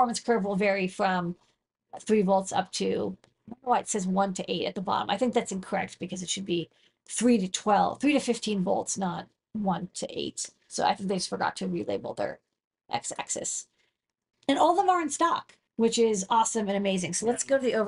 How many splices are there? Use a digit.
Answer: 2